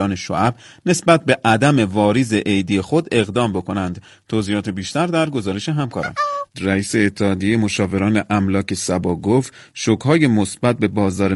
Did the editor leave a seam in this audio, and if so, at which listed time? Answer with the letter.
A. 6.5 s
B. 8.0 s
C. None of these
A